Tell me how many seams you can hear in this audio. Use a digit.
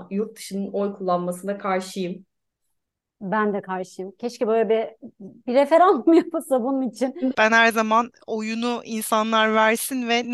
1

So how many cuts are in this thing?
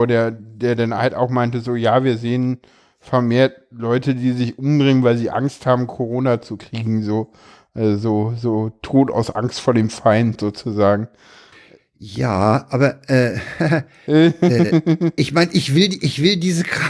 0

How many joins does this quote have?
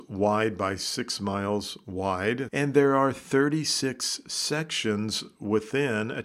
1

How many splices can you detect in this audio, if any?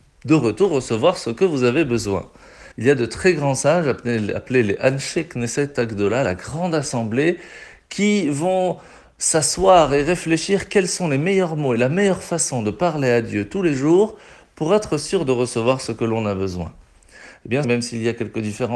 2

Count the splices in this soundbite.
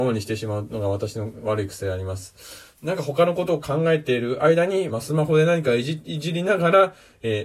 2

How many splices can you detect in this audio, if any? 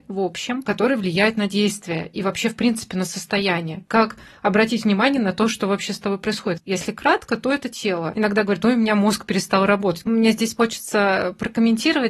2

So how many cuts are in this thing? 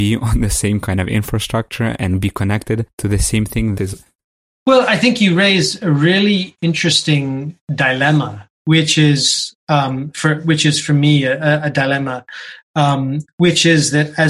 2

